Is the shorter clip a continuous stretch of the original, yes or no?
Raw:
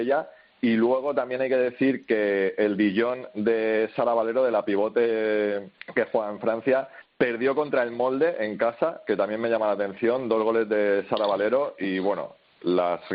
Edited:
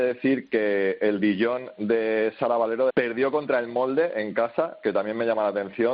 no